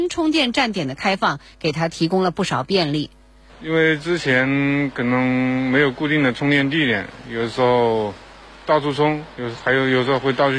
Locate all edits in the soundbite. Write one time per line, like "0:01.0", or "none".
none